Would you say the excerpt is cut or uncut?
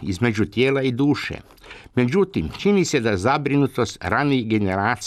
uncut